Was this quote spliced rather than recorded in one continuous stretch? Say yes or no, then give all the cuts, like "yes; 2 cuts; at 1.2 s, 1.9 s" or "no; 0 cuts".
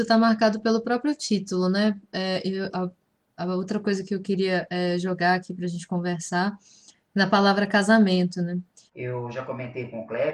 yes; 2 cuts; at 2.7 s, 8.9 s